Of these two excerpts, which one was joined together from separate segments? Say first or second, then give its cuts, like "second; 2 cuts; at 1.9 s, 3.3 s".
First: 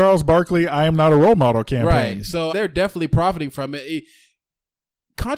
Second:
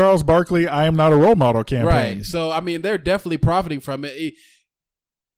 first; 1 cut; at 2.5 s